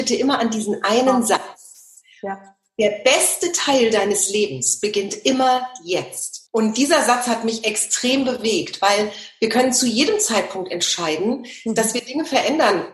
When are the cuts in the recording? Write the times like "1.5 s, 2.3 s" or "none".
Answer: 6.5 s

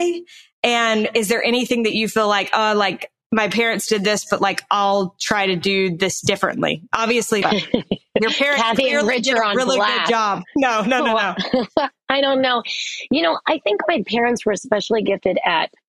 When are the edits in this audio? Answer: 7.4 s

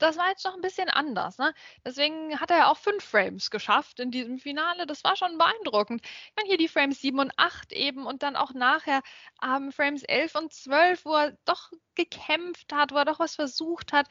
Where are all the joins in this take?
none

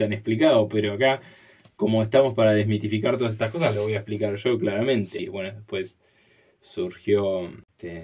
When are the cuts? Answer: 5.2 s

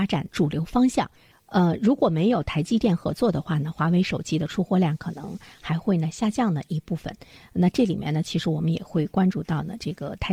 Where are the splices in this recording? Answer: 1.3 s

